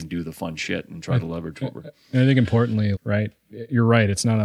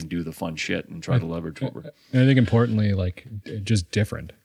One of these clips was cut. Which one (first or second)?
first